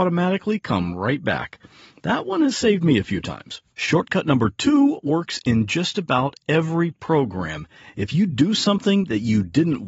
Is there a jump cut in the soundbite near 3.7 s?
no; 0 cuts

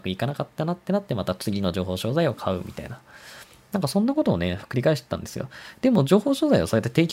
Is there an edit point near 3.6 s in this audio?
no; 0 cuts

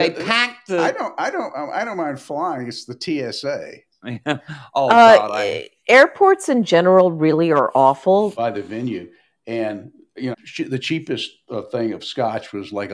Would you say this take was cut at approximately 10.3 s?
yes; 2 cuts; at 8.3 s, 10.3 s

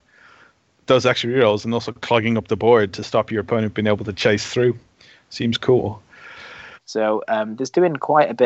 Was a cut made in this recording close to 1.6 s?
no; 1 cut; at 6.7 s

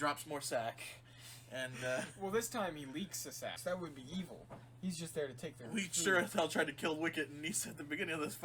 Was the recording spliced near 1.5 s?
no; 1 cut; at 3.6 s

